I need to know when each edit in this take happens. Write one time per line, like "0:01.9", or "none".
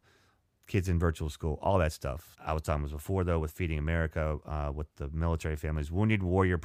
0:02.3